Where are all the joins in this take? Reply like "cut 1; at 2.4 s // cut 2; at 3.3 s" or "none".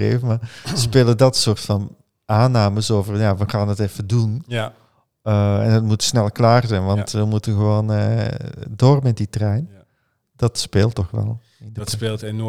none